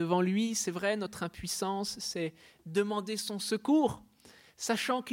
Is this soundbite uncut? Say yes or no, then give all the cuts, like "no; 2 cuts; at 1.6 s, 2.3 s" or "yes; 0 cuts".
yes; 0 cuts